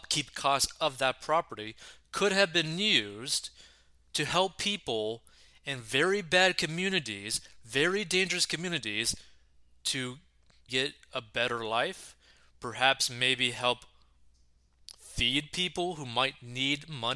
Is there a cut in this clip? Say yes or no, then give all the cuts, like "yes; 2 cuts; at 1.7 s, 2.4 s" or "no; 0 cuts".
yes; 1 cut; at 10.7 s